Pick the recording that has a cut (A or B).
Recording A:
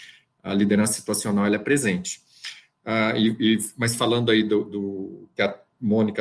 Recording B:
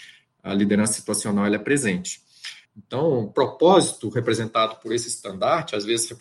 B